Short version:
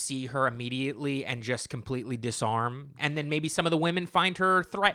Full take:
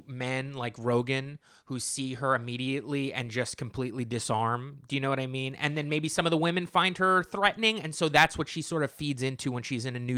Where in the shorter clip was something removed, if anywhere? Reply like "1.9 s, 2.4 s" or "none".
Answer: 3.0 s